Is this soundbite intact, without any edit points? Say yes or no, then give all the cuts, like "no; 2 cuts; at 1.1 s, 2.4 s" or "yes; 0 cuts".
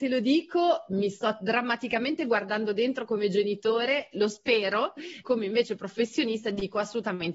no; 1 cut; at 5.2 s